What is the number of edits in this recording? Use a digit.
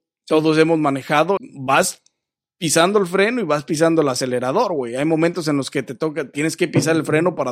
1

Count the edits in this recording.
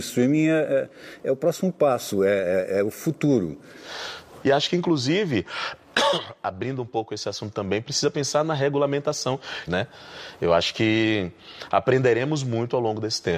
2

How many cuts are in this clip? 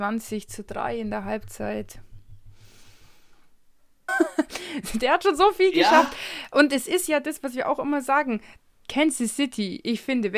1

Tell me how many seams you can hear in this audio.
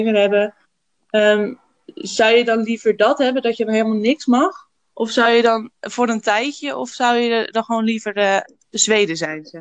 1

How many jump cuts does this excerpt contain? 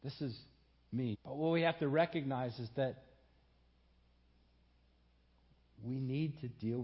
1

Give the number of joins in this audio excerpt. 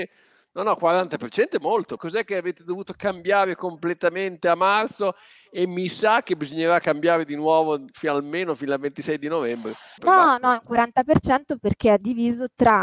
2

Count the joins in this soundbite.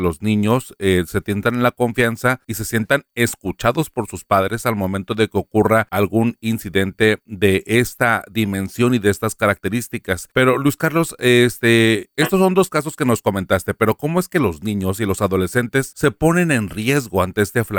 0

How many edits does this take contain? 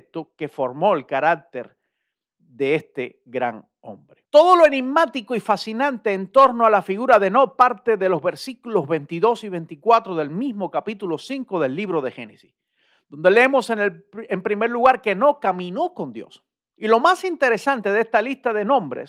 2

